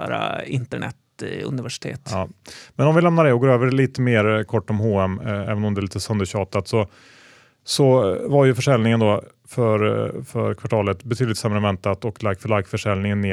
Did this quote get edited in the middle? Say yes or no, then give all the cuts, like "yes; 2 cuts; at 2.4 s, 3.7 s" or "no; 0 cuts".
no; 0 cuts